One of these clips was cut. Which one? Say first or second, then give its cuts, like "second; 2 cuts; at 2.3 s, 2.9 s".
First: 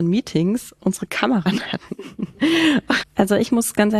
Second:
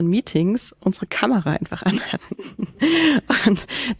first; 2 cuts; at 1.4 s, 3.0 s